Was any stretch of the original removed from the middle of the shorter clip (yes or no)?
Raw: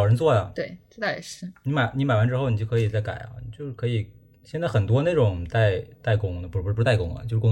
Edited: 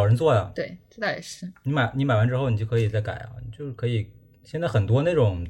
no